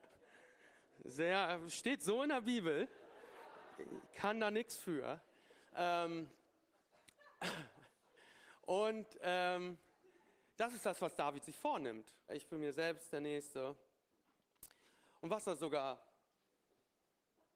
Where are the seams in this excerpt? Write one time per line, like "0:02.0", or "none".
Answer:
0:12.3
0:15.2